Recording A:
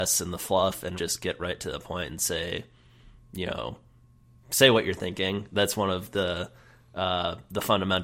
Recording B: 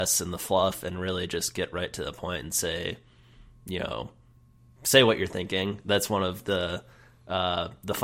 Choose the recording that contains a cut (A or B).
A